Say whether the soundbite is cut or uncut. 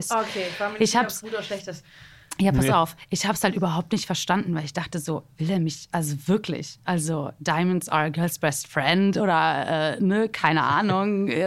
uncut